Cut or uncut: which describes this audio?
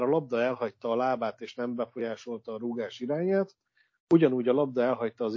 uncut